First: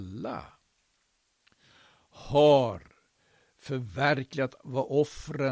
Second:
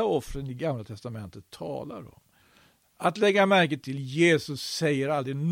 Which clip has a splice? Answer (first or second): second